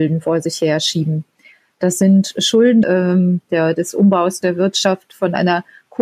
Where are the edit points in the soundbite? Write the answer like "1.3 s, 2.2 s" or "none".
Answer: 2.8 s